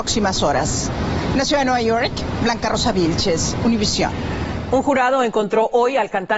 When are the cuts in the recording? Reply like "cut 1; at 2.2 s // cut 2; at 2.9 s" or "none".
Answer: none